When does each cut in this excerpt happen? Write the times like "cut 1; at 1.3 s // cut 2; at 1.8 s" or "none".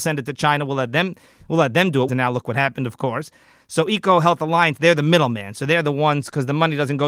cut 1; at 2.1 s